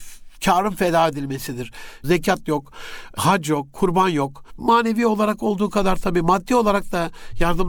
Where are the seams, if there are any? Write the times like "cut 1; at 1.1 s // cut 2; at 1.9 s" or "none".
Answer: cut 1; at 2.0 s // cut 2; at 4.5 s